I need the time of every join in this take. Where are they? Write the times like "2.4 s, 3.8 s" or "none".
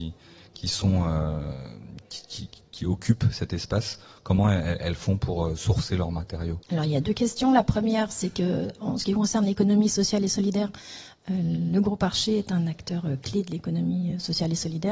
6.6 s